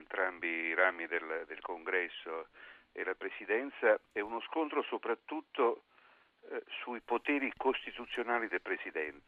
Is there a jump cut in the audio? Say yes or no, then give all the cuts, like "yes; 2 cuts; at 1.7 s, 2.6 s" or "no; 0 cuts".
yes; 1 cut; at 4.1 s